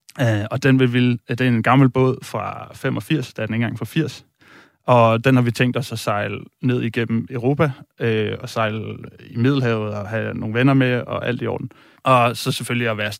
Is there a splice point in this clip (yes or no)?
yes